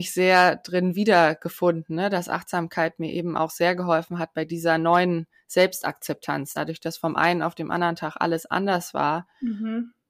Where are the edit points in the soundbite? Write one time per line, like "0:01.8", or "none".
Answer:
none